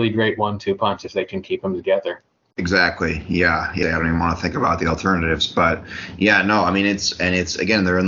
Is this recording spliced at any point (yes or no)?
yes